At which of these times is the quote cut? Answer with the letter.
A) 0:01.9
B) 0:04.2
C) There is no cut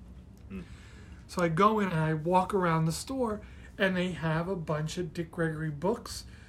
A